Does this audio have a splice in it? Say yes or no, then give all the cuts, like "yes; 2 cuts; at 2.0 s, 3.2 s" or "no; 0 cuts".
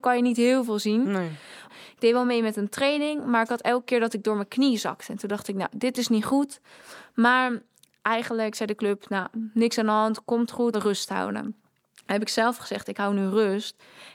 yes; 2 cuts; at 1.7 s, 10.7 s